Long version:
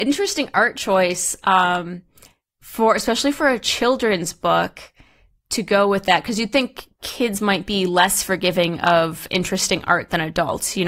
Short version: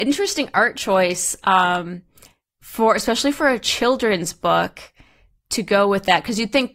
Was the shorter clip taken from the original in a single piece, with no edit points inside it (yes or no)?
yes